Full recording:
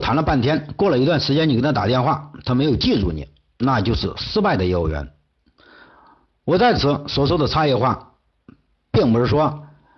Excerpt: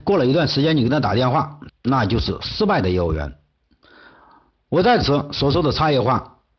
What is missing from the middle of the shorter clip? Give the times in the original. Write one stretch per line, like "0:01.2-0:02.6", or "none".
0:02.4-0:03.4